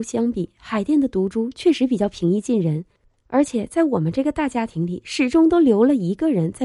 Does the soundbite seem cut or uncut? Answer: uncut